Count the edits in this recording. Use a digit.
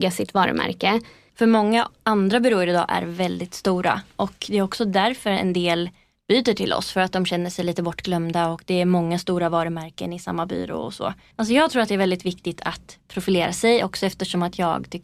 2